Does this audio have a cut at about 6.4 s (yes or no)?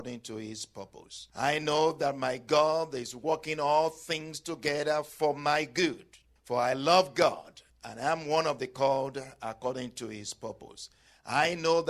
no